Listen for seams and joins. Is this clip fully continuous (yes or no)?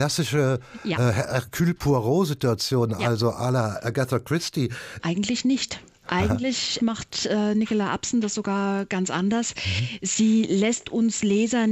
no